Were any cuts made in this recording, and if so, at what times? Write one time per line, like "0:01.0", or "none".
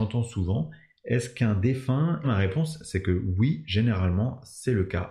0:02.2